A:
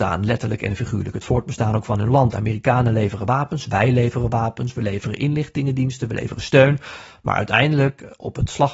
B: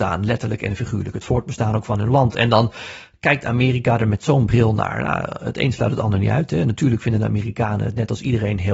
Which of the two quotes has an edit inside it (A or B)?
A